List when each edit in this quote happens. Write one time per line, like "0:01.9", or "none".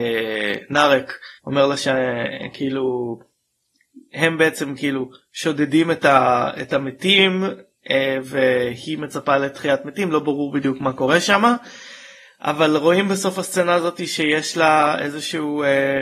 0:01.4